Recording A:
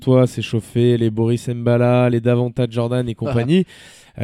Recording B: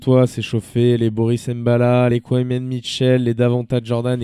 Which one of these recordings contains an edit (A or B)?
A